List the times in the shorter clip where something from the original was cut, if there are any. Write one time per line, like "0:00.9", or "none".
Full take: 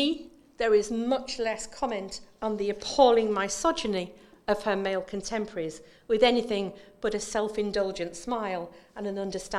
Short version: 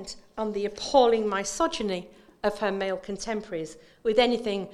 none